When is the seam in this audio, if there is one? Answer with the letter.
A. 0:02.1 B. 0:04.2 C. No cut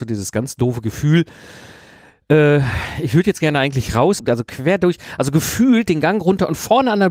B